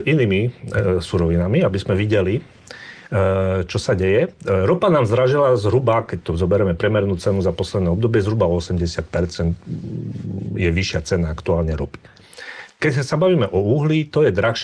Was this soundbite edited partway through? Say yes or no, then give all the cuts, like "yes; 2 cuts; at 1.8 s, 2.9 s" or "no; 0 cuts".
no; 0 cuts